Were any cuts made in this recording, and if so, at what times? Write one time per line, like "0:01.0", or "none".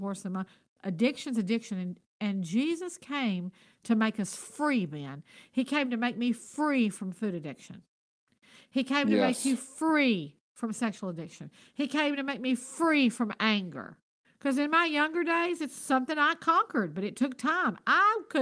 none